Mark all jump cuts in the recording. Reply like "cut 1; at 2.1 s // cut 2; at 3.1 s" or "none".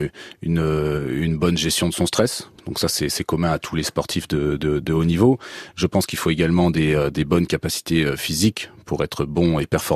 none